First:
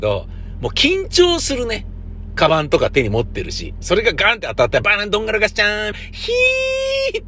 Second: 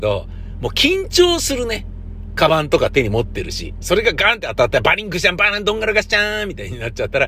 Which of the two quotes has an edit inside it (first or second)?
first